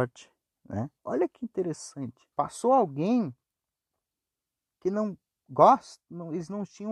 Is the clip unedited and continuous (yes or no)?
no